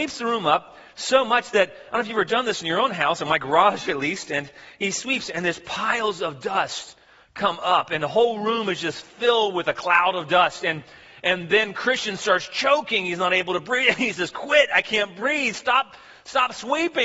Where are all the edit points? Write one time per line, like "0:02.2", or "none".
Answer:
none